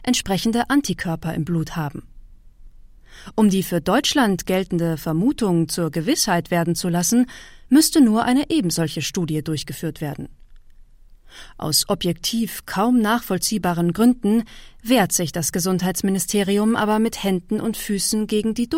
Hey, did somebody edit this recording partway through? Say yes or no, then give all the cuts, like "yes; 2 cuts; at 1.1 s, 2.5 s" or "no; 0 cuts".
no; 0 cuts